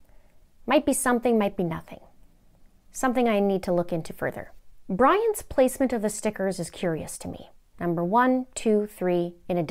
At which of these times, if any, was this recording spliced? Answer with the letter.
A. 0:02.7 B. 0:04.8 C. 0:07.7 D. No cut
D